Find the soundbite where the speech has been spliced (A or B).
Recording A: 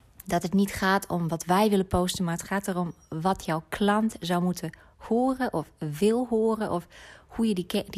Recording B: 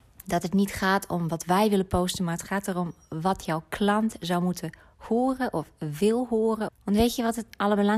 B